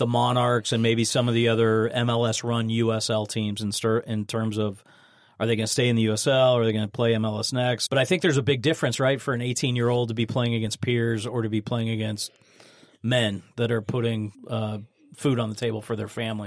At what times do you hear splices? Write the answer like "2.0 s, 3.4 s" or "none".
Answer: 7.9 s, 14.3 s

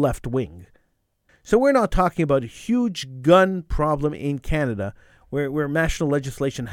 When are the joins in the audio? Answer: 1.3 s

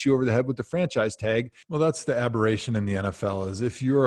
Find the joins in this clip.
1.6 s

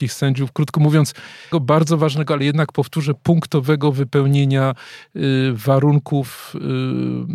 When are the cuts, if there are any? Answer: 1.5 s

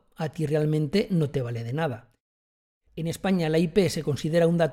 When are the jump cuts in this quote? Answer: 2.9 s

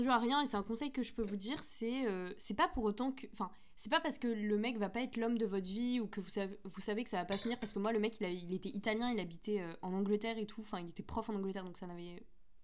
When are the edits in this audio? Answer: none

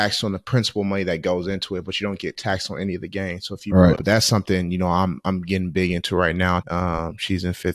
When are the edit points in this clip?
4.0 s, 6.6 s

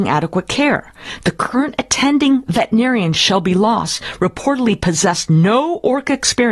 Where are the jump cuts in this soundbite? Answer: none

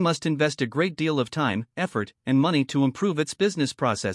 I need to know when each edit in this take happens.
none

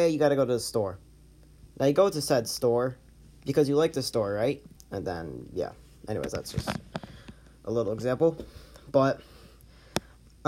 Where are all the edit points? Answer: 4.8 s

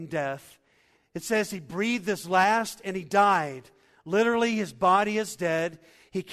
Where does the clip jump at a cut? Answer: 1.0 s

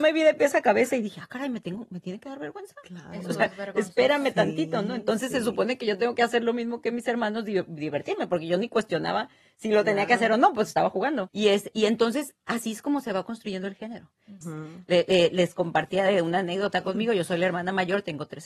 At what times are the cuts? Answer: 11.3 s, 14.4 s

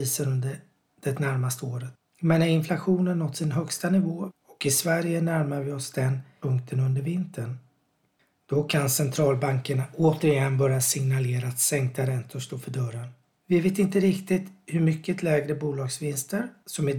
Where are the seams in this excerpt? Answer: 4.3 s, 13.4 s

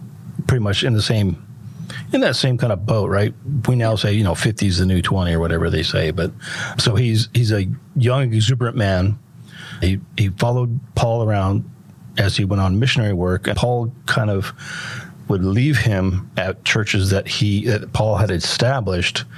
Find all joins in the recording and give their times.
13.5 s

